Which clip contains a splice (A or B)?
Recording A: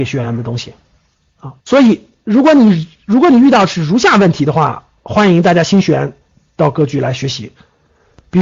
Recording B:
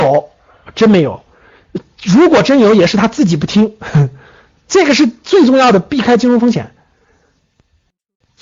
A